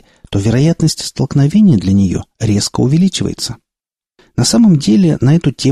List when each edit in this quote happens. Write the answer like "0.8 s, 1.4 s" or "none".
4.2 s